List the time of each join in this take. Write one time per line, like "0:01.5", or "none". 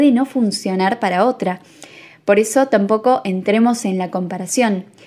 none